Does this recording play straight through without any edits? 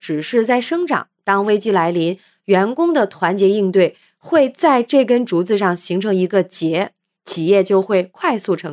yes; 0 cuts

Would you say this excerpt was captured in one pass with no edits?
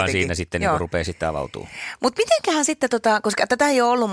yes; 0 cuts

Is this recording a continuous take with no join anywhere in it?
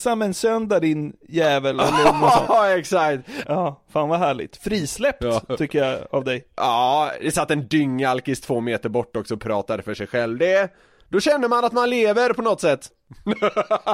no; 2 cuts; at 3.4 s, 12.9 s

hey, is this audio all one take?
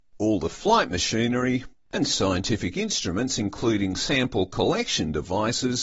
yes; 0 cuts

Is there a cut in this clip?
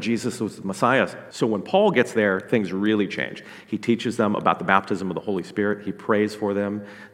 yes; 1 cut; at 1.3 s

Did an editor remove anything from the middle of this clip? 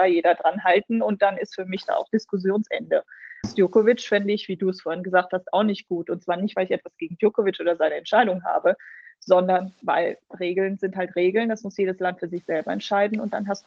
yes; 1 cut; at 3.4 s

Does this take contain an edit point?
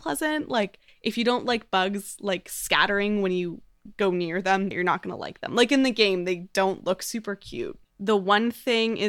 yes; 2 cuts; at 4.7 s, 7.8 s

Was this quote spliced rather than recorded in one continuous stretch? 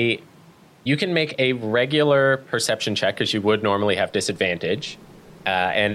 no; 0 cuts

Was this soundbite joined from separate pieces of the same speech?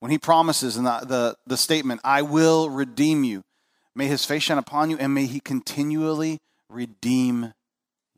no; 0 cuts

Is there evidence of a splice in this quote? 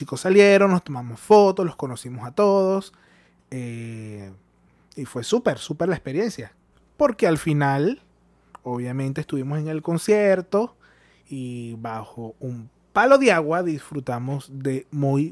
no; 0 cuts

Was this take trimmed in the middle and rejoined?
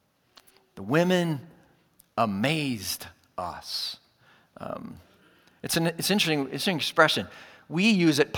no; 0 cuts

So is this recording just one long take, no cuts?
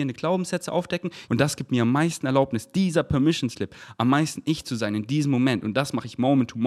no; 1 cut; at 1.3 s

